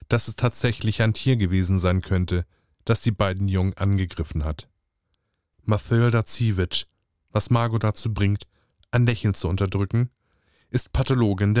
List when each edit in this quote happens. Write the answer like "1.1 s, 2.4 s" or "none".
5.5 s, 7.2 s